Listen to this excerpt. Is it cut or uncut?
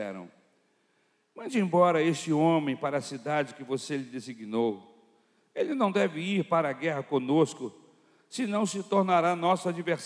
uncut